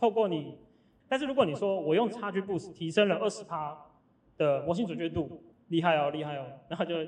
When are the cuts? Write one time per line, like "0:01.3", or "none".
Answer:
0:01.0
0:05.5